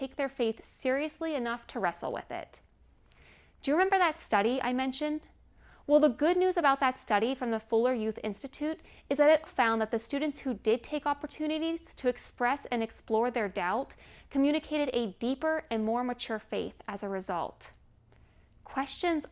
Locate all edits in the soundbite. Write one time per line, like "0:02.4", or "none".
0:09.5

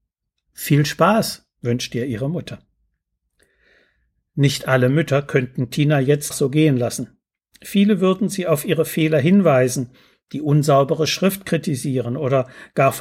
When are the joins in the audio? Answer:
0:06.3

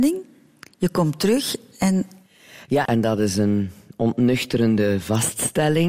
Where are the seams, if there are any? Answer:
0:02.9

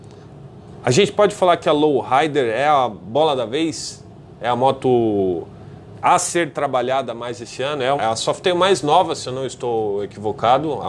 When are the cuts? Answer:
0:08.0

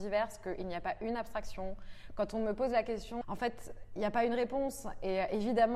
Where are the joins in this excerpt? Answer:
0:03.2

